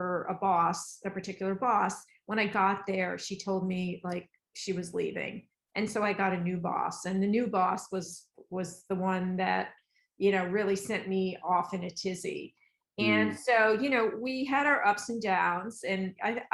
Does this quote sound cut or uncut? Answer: uncut